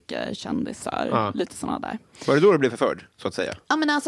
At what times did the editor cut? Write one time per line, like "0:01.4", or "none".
0:03.1